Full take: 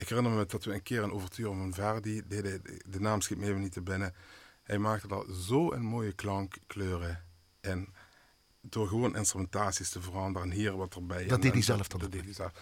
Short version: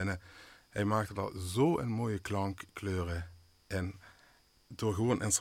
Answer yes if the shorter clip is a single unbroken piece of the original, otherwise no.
yes